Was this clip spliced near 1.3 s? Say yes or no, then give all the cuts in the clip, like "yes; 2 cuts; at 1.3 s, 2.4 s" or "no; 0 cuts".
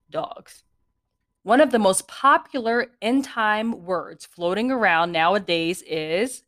yes; 1 cut; at 1.3 s